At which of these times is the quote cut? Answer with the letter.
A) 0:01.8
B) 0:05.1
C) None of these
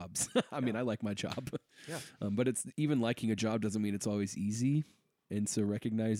C